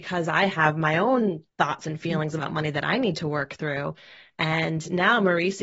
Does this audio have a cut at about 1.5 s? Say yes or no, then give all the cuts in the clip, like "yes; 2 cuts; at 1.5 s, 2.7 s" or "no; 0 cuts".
yes; 1 cut; at 1.5 s